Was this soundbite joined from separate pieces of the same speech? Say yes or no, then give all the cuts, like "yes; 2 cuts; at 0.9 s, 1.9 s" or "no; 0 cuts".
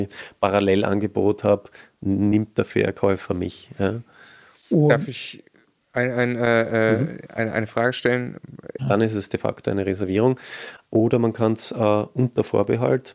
yes; 2 cuts; at 8.8 s, 10.8 s